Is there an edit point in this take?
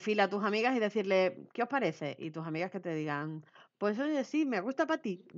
no; 0 cuts

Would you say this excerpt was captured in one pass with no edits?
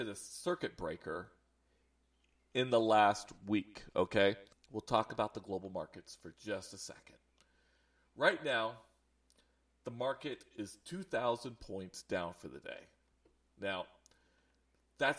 no; 1 cut; at 4.5 s

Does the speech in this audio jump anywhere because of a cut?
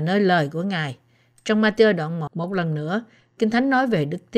yes; 1 cut; at 2.3 s

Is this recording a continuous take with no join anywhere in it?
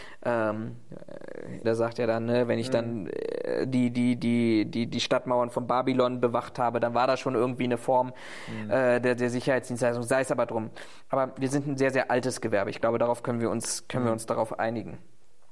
no; 1 cut; at 1.6 s

